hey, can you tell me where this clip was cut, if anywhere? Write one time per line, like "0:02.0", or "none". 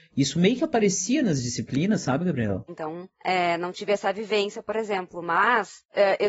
0:02.7